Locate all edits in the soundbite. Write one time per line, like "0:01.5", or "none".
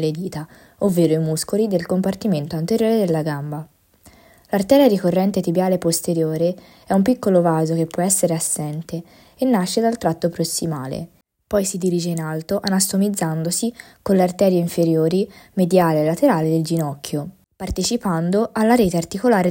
none